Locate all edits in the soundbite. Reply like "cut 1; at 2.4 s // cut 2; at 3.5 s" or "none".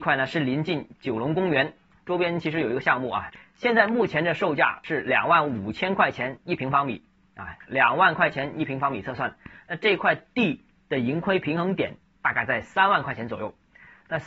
cut 1; at 7.7 s

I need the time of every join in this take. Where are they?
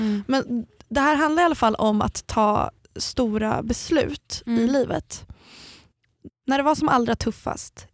cut 1; at 6.3 s

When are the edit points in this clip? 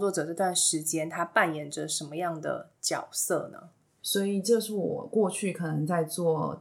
cut 1; at 4.0 s

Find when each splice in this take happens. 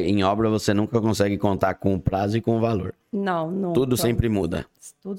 none

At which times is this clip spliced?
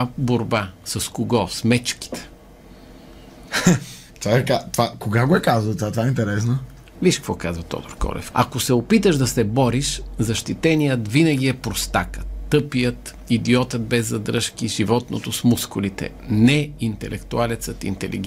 cut 1; at 4.1 s // cut 2; at 6.9 s // cut 3; at 8.3 s

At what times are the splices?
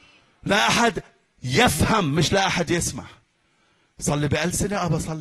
none

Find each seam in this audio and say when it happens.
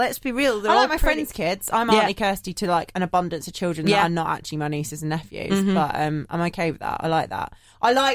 none

